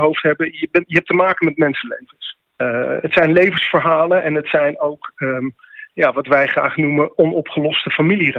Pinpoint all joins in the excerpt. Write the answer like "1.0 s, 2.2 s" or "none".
none